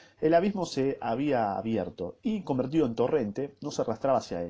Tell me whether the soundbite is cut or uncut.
uncut